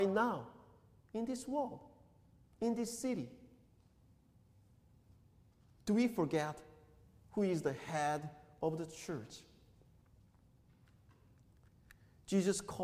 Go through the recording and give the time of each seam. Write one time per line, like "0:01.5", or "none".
none